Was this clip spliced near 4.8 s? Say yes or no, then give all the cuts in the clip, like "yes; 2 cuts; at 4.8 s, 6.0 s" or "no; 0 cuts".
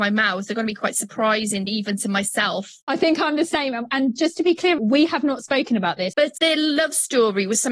yes; 2 cuts; at 4.8 s, 6.1 s